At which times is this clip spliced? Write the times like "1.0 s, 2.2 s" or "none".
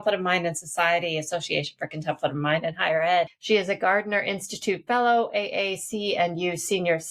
3.3 s